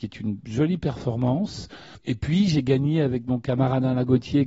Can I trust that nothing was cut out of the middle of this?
yes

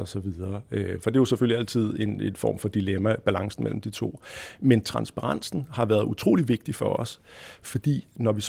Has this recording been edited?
no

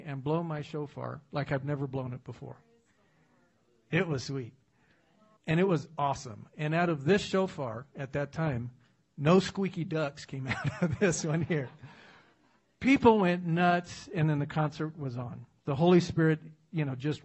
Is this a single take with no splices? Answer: no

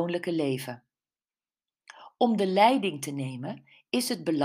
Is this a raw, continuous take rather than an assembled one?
yes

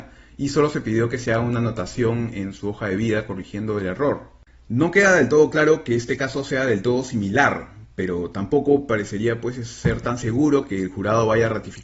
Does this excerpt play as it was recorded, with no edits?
yes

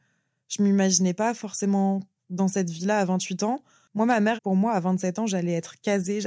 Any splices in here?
yes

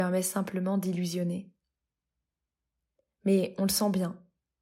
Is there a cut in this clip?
no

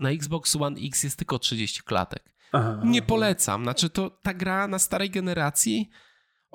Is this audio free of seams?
yes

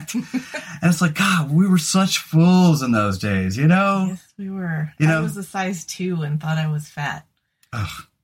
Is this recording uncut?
yes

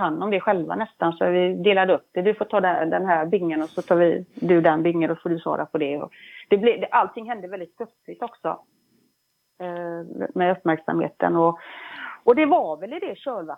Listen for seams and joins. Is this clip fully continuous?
yes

